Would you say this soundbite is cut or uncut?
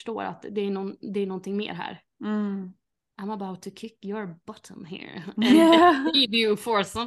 uncut